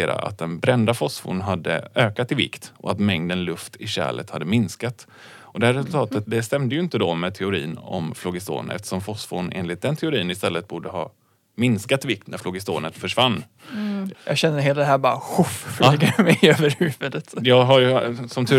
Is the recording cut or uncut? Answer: cut